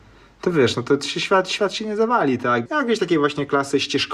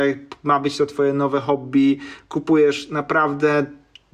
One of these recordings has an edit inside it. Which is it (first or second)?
first